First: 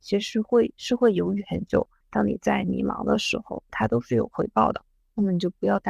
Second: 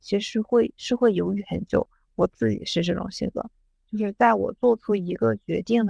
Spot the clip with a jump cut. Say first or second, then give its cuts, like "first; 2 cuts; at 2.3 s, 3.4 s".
first; 2 cuts; at 2.0 s, 3.7 s